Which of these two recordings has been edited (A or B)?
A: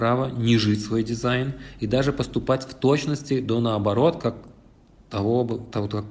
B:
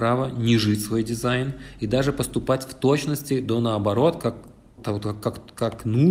B